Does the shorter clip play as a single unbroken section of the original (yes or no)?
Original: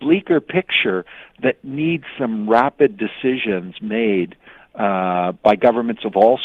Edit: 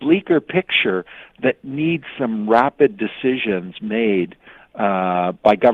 yes